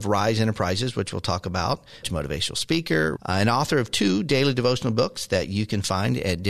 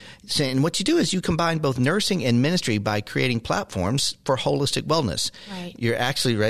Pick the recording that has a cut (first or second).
first